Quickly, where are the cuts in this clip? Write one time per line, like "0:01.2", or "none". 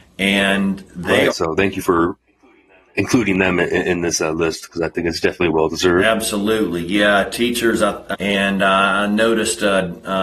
0:01.3
0:08.1